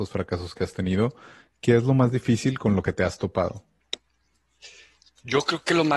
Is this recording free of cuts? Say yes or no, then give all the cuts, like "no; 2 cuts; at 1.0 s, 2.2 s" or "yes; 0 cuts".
yes; 0 cuts